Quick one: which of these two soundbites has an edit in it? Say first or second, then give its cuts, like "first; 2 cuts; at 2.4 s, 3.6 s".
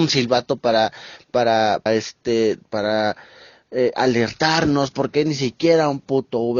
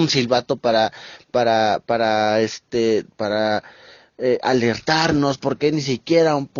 first; 1 cut; at 1.9 s